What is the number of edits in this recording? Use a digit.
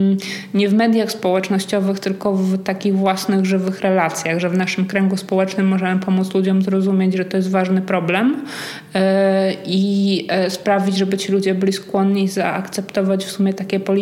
0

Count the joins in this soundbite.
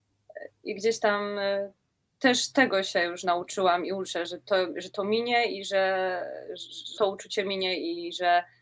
2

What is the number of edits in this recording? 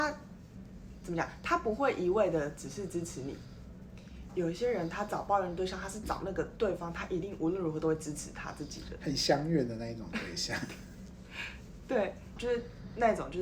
2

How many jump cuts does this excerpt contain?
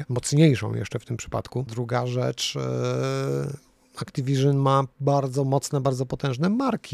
1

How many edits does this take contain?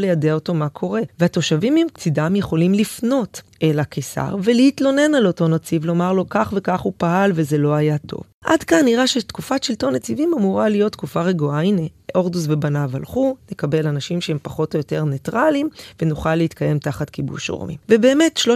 0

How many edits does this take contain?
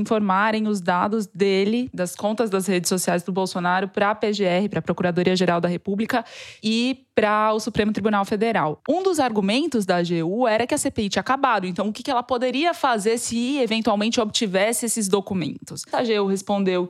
2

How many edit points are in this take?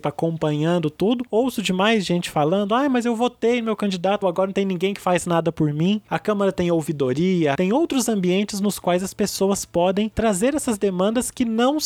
3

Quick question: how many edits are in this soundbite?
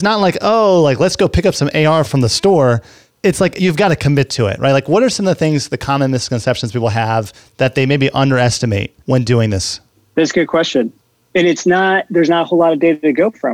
0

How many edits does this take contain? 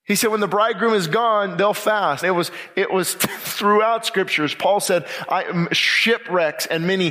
1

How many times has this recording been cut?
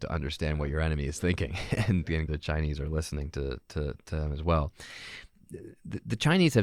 1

